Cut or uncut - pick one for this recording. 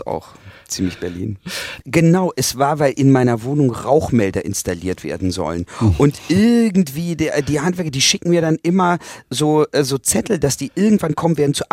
cut